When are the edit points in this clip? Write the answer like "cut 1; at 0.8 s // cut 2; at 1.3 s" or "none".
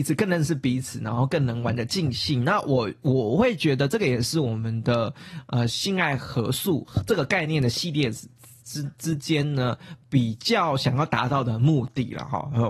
none